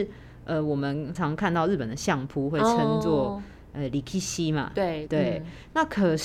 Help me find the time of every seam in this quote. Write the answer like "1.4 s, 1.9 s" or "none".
1.1 s, 5.1 s